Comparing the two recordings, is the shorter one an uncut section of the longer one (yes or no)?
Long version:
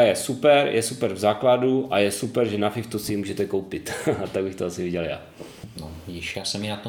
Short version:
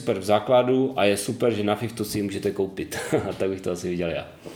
yes